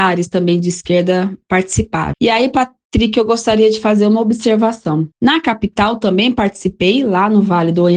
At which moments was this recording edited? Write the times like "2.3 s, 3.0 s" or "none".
2.1 s, 5.1 s